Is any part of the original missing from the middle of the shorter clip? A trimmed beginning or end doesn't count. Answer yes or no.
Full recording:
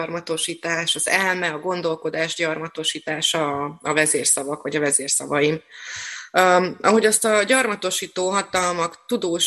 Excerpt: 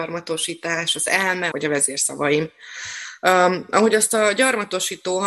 yes